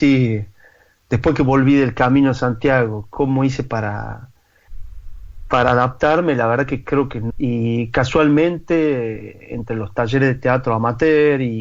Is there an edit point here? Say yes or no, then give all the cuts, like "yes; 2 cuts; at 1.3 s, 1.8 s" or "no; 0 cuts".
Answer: yes; 1 cut; at 7.3 s